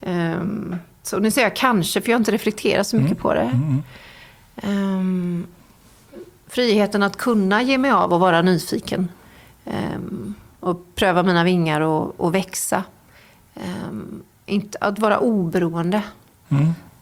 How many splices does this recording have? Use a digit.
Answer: 1